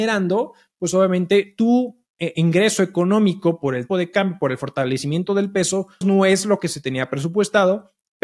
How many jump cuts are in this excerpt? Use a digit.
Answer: 2